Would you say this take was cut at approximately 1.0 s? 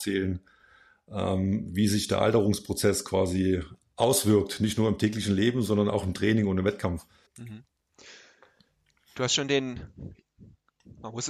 no; 1 cut; at 7.3 s

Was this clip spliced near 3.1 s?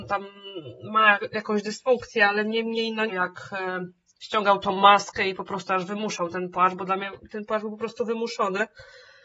yes; 1 cut; at 3.1 s

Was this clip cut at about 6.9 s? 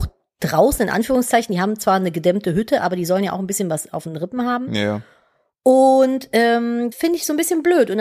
yes; 1 cut; at 6.9 s

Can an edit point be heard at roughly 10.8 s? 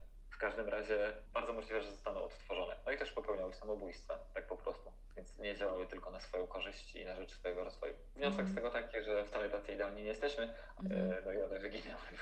yes; 1 cut; at 10.8 s

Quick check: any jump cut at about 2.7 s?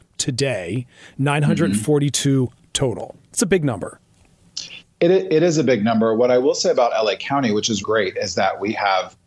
no; 1 cut; at 7.8 s

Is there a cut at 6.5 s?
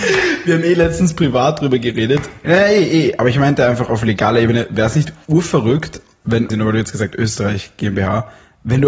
yes; 2 cuts; at 2.4 s, 6.5 s

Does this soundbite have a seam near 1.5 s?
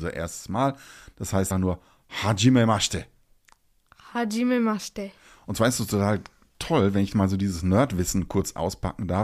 yes; 1 cut; at 1.5 s

